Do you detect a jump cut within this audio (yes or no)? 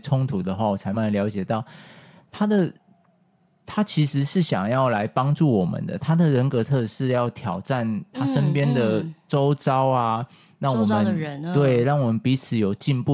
yes